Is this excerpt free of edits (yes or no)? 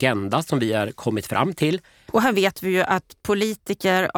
no